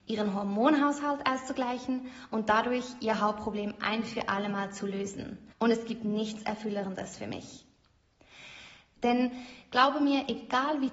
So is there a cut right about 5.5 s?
yes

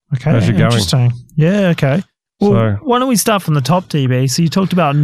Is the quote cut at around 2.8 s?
no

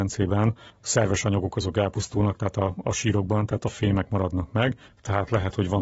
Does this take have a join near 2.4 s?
no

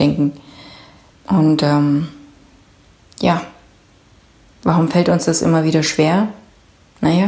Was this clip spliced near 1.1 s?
yes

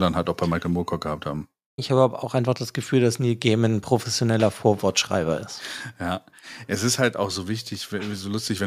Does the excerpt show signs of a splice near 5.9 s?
no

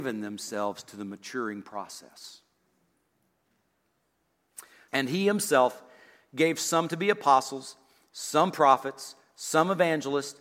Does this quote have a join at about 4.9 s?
yes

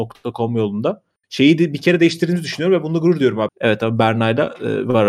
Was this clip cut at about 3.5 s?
yes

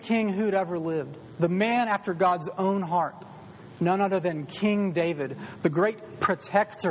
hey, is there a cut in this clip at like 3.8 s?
no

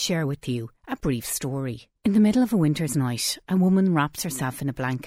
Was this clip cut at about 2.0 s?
yes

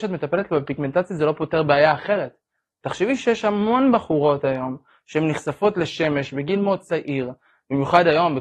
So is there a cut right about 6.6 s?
yes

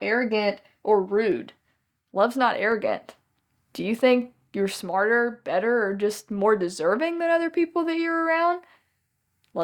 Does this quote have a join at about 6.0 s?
no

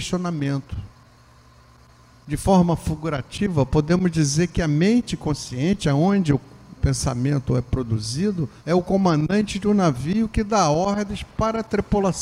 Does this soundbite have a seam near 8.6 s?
yes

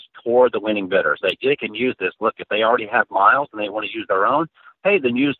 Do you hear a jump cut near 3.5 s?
no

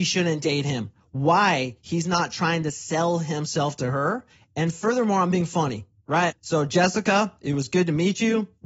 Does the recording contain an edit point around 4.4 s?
no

